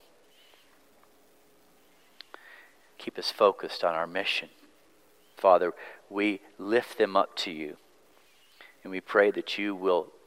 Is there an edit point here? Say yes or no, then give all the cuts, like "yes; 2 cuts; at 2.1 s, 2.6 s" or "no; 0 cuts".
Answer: yes; 2 cuts; at 2.8 s, 5.4 s